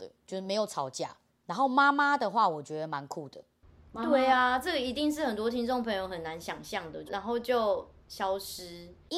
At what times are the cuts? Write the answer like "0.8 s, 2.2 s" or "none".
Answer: 7.1 s